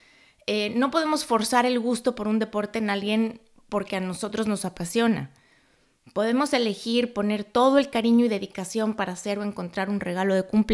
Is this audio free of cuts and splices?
yes; 0 cuts

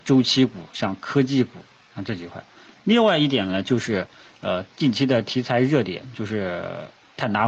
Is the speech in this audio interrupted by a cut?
no; 0 cuts

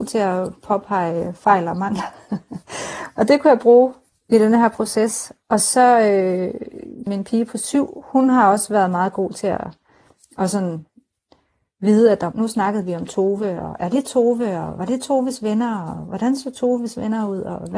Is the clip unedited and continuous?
no; 2 cuts; at 7.1 s, 12.3 s

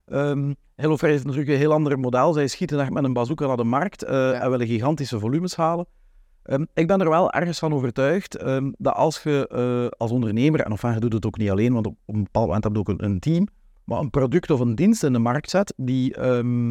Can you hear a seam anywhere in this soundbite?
no; 0 cuts

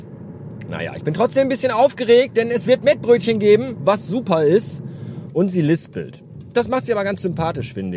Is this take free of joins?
no; 1 cut; at 5.3 s

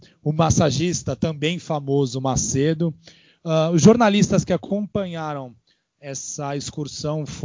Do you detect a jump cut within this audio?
no; 0 cuts

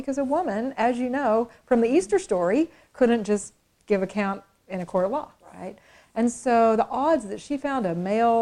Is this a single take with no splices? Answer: no; 1 cut; at 5.4 s

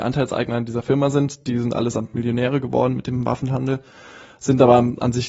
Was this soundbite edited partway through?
no; 0 cuts

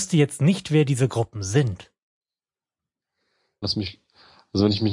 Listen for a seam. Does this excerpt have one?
yes; 1 cut; at 3.6 s

